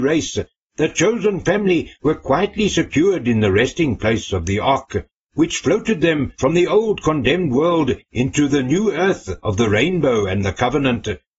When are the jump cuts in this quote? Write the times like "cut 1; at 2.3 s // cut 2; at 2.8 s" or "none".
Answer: none

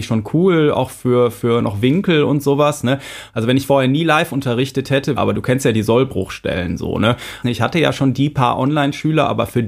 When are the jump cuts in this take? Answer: cut 1; at 3.3 s // cut 2; at 5.2 s // cut 3; at 7.4 s

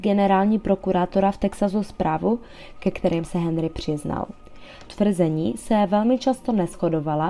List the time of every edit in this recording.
cut 1; at 2.7 s // cut 2; at 4.9 s

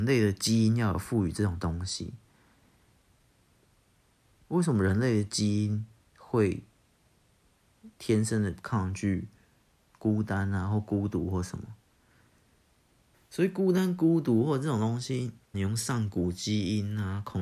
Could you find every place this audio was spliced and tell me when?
cut 1; at 7.9 s // cut 2; at 13.1 s // cut 3; at 15.5 s

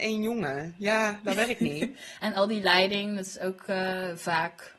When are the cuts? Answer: none

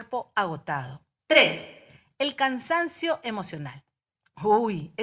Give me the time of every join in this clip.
cut 1; at 1.2 s

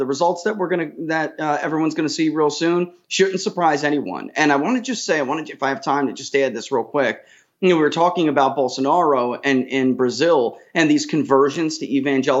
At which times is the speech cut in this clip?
none

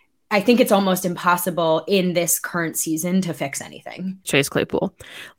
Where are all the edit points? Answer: cut 1; at 4.3 s

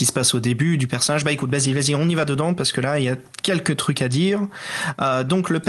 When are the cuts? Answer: none

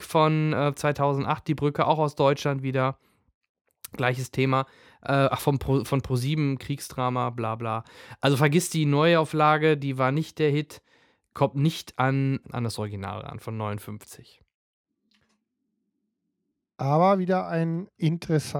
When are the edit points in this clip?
cut 1; at 12.4 s

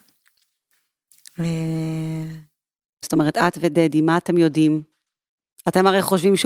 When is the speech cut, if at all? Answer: cut 1; at 3.0 s

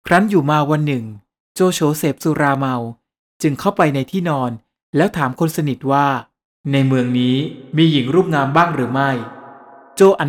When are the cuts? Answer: none

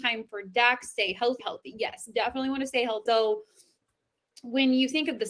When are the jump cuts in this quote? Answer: cut 1; at 1.4 s // cut 2; at 3.1 s

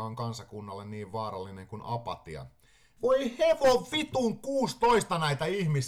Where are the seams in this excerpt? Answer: cut 1; at 3.0 s

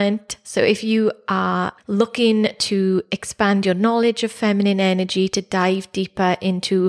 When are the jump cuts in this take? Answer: cut 1; at 1.8 s

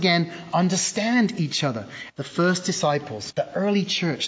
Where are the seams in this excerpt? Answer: cut 1; at 2.1 s // cut 2; at 3.3 s

